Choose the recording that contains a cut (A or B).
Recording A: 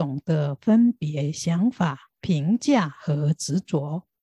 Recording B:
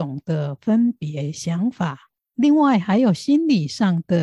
B